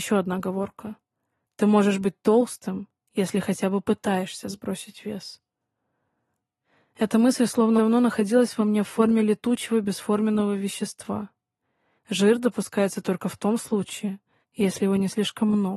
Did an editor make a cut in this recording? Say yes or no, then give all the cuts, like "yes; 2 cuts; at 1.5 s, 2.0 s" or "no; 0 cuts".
yes; 3 cuts; at 7.8 s, 12.0 s, 14.4 s